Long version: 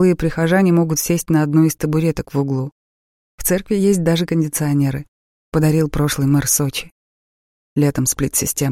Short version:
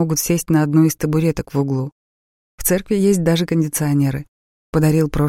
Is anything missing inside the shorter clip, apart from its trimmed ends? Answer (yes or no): no